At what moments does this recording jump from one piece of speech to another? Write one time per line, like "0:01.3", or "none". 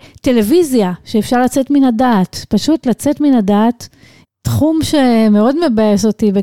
0:04.2